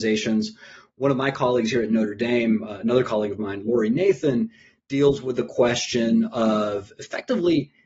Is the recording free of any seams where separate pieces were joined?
yes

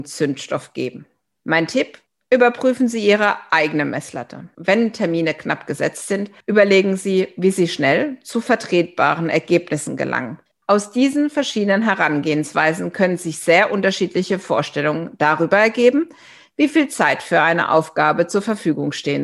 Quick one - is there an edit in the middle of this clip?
yes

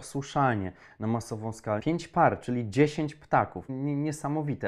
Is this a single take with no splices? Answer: no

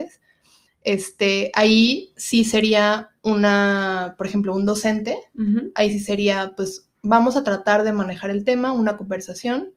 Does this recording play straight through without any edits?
yes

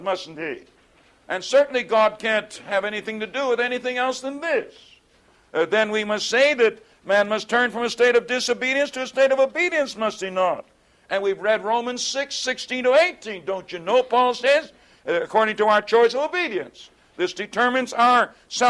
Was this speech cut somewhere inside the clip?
no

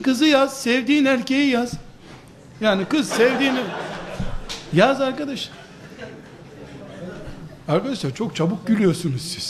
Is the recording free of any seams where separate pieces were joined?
no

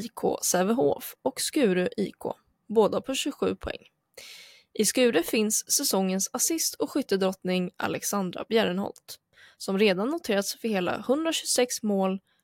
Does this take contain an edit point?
no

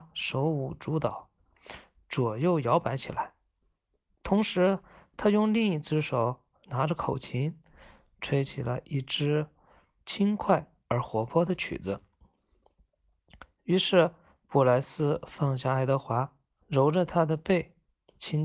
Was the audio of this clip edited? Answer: yes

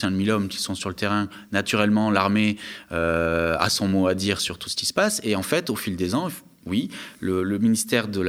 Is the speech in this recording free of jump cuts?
yes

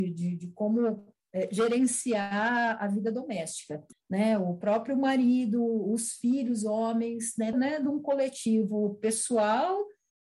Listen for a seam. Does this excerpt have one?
yes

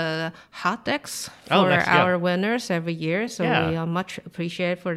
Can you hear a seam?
no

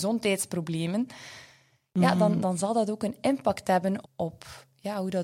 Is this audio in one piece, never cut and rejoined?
no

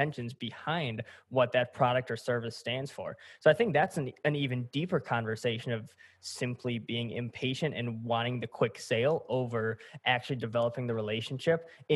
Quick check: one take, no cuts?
yes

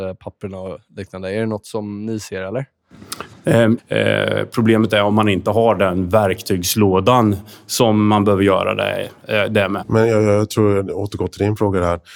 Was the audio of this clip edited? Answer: yes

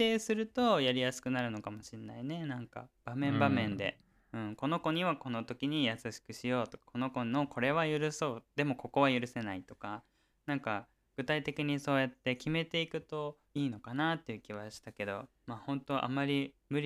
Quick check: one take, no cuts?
no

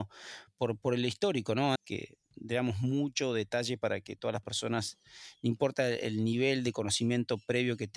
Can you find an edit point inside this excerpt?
yes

